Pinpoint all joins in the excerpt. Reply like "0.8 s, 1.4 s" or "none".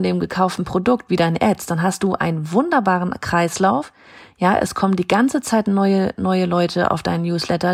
none